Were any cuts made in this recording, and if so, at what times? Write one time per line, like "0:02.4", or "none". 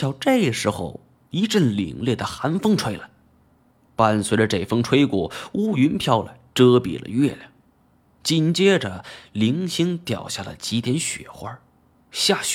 none

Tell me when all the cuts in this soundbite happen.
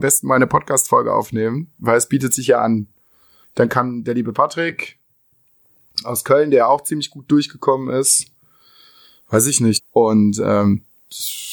0:03.4
0:09.8

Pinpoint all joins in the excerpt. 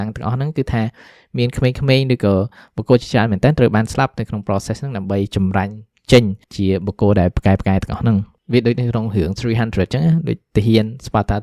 0:06.4

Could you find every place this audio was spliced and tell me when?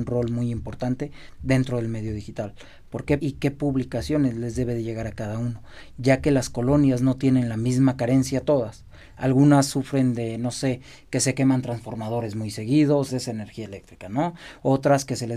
0:03.2
0:13.1

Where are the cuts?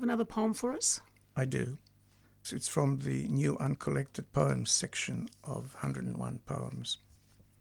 0:02.4

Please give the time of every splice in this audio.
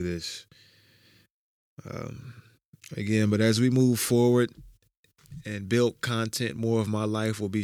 none

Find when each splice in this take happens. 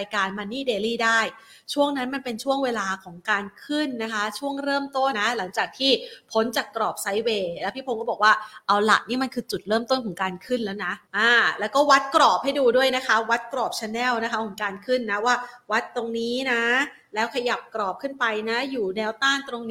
0:05.1
0:11.1

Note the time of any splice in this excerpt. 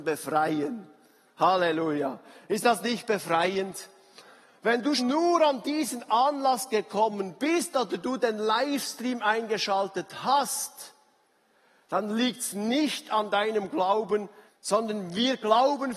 0:05.0
0:14.5

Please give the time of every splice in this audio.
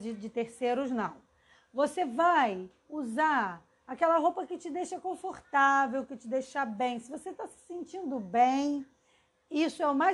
none

